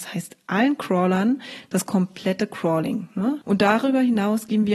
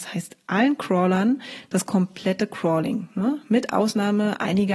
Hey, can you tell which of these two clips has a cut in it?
first; 1 cut; at 3.4 s

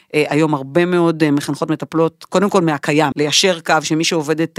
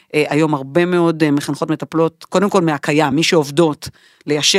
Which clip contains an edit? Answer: first; 1 cut; at 3.1 s

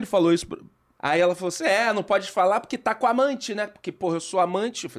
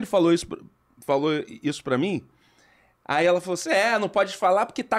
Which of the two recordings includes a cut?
first; 1 cut; at 0.9 s

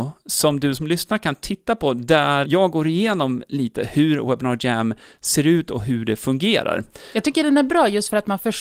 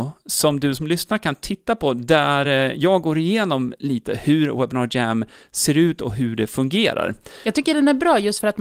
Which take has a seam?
first; 1 cut; at 2.4 s

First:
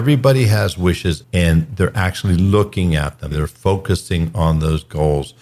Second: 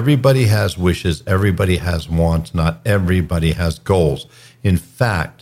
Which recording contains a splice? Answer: first; 2 cuts; at 1.2 s, 3.3 s

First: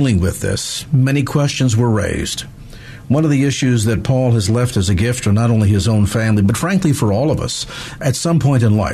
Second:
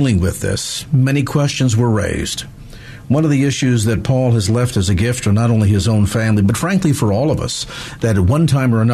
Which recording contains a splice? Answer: first; 1 cut; at 8.0 s

